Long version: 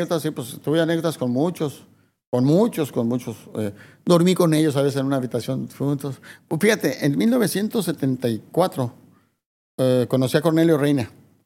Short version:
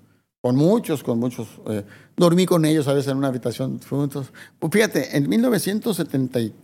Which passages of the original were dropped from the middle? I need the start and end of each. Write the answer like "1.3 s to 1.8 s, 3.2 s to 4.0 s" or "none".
none